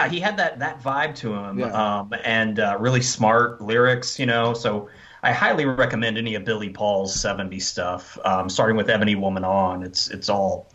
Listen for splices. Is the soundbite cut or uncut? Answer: uncut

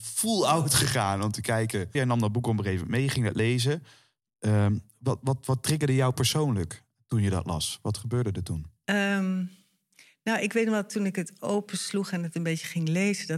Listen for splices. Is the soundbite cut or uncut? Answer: cut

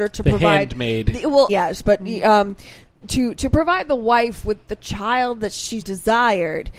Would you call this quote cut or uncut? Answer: cut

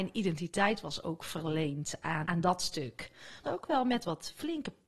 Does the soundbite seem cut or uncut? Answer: cut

